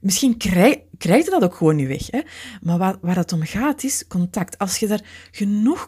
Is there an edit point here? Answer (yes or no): no